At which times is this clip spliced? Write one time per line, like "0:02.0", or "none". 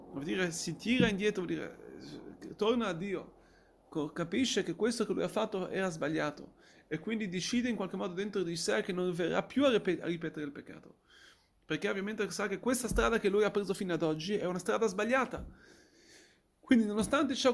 none